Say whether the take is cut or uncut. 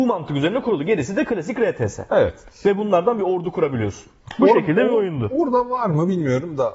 uncut